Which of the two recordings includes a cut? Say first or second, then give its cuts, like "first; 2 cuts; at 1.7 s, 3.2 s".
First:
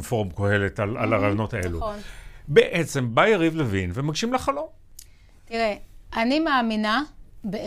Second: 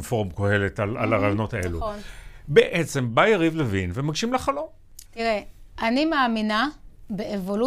second; 1 cut; at 5.0 s